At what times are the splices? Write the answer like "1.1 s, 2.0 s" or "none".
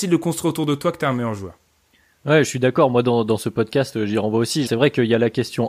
4.7 s